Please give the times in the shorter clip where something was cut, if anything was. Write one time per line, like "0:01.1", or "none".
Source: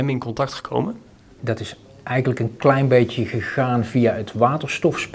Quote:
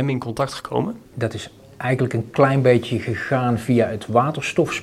0:01.1